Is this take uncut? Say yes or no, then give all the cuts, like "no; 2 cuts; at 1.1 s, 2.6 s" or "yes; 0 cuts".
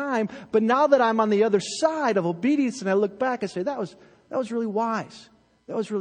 yes; 0 cuts